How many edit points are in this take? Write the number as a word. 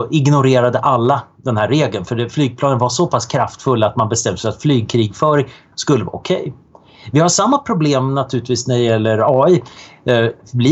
zero